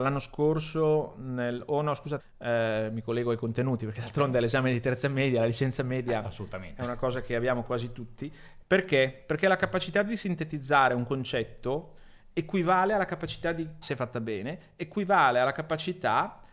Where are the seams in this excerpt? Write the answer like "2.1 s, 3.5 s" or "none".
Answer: 2.2 s, 8.6 s, 13.8 s

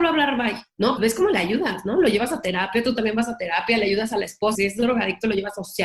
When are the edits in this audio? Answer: 1.0 s, 4.5 s

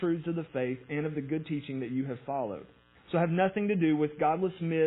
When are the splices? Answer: none

